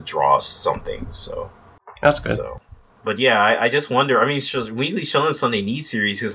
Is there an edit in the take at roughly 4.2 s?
no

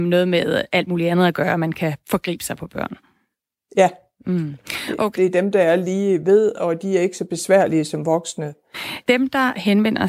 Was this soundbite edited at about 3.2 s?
no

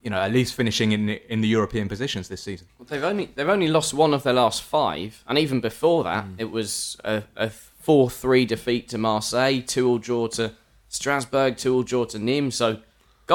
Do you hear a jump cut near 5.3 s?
no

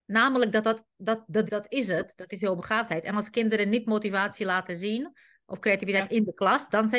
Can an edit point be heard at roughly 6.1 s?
no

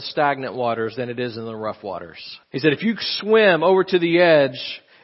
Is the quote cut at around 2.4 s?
yes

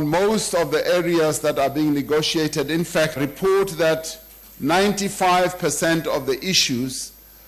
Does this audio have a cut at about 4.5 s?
no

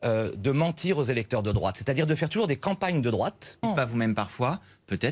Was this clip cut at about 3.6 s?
yes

